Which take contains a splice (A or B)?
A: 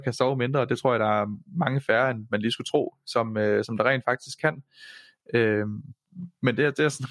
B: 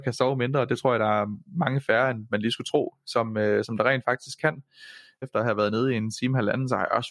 B